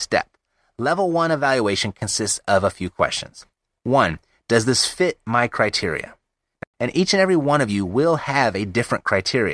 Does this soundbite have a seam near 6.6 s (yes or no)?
yes